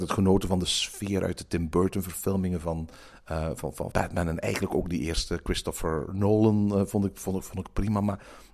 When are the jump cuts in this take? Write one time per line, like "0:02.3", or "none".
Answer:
0:03.9